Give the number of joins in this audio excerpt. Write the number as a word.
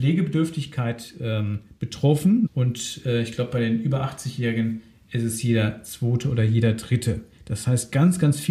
one